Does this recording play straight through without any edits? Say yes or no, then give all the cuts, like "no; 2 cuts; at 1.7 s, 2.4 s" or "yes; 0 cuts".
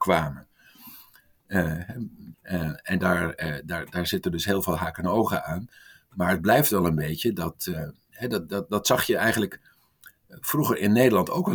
no; 1 cut; at 2.3 s